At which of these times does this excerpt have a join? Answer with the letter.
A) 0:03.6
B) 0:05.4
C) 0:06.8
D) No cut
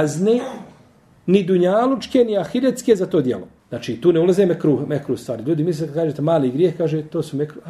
A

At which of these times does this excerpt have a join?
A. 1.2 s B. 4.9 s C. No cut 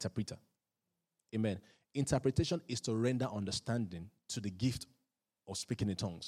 C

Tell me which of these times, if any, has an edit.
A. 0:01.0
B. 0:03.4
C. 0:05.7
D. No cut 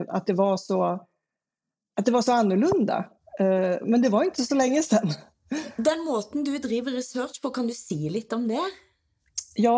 D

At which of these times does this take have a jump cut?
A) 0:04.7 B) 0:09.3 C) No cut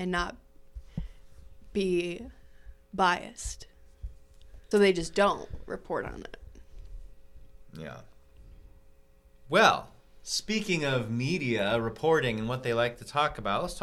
A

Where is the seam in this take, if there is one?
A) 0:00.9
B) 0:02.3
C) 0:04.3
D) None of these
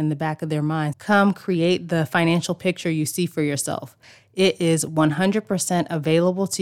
A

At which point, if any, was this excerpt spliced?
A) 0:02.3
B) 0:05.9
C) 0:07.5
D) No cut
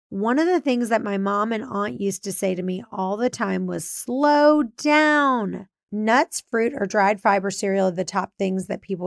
B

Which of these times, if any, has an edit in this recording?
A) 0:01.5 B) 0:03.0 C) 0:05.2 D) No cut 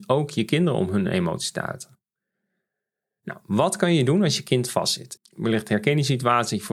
C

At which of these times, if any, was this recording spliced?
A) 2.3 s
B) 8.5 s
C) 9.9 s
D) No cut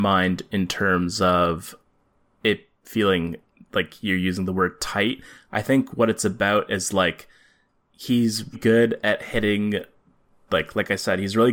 B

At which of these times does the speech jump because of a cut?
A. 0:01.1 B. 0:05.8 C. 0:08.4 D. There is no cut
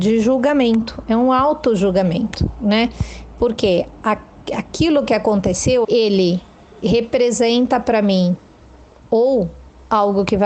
B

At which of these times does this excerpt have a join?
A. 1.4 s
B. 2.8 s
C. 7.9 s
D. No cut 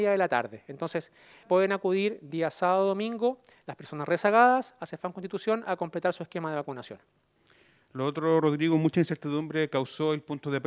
A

